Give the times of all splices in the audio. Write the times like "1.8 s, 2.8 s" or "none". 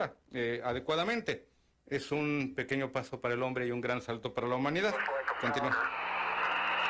none